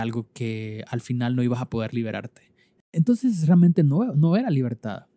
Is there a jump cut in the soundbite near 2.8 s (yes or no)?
yes